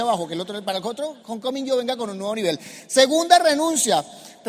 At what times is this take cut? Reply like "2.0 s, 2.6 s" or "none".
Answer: none